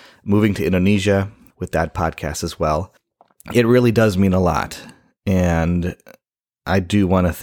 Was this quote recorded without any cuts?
yes; 0 cuts

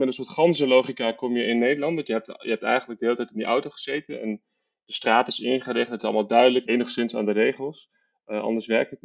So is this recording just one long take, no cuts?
no; 1 cut; at 6.6 s

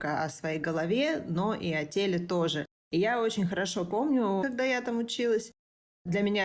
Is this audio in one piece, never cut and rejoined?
no; 2 cuts; at 2.8 s, 4.4 s

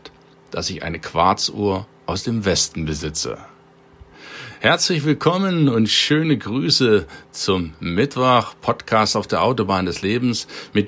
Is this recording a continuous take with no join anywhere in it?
yes; 0 cuts

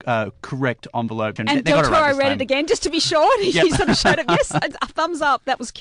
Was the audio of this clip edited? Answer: yes; 1 cut; at 1.4 s

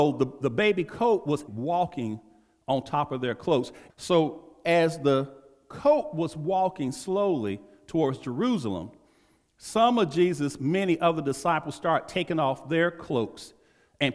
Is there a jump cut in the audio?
yes; 2 cuts; at 1.5 s, 3.9 s

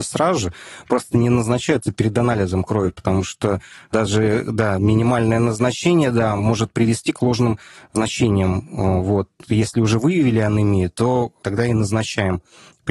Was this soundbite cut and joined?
no; 0 cuts

